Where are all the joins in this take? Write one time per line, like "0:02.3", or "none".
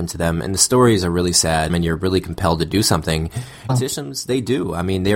0:01.7
0:03.7